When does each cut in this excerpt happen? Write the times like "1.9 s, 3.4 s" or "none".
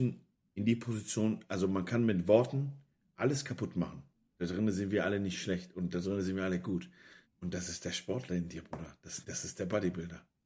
7.3 s, 9.2 s